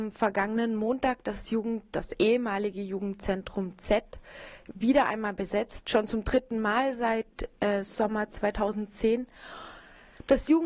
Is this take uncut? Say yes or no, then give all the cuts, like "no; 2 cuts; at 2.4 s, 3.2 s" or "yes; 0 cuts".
yes; 0 cuts